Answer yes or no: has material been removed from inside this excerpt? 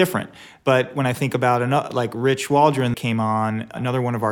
yes